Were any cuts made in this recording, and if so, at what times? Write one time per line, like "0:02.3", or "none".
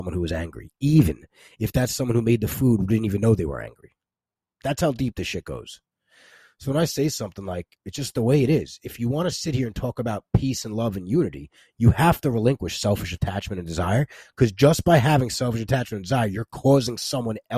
none